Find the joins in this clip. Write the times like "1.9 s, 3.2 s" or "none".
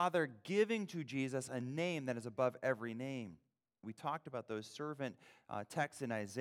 3.8 s